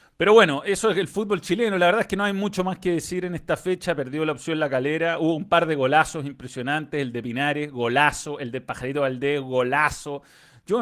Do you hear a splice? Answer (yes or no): no